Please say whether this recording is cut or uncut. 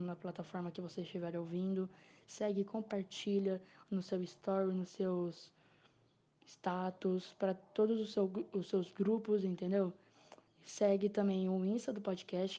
uncut